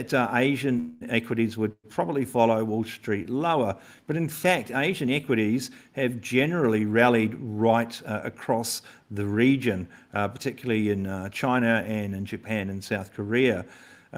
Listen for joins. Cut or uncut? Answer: uncut